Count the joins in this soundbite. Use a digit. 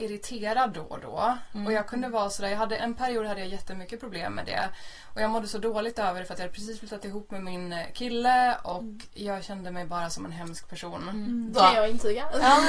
2